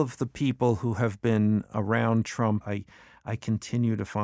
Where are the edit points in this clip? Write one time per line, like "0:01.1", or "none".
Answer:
0:02.6

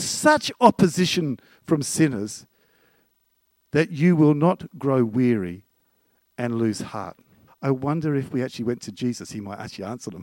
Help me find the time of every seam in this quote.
0:07.5

